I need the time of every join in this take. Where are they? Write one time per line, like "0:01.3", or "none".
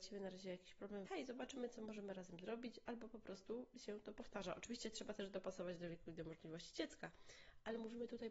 0:01.1